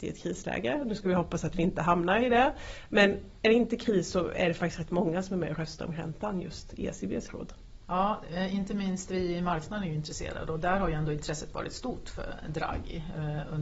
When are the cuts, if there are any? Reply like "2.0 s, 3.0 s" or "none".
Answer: 7.8 s